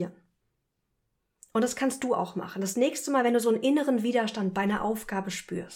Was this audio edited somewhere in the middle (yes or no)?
no